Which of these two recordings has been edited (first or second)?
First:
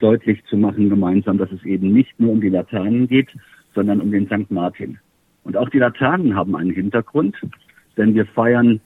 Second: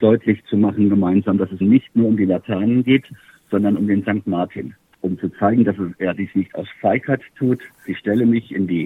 second